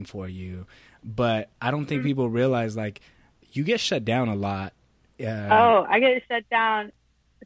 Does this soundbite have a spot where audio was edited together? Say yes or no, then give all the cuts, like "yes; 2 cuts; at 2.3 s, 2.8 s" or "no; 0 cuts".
no; 0 cuts